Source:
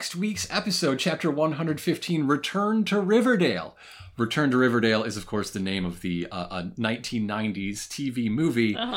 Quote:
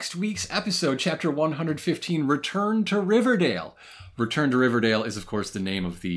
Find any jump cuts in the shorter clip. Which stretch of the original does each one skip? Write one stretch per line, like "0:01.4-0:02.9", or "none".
none